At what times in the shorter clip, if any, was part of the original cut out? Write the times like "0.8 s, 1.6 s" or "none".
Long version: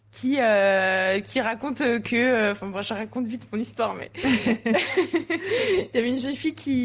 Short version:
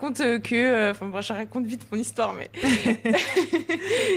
none